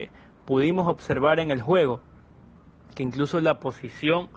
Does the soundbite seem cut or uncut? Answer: uncut